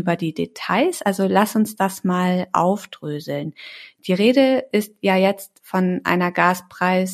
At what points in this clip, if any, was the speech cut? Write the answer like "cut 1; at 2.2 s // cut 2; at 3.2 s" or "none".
none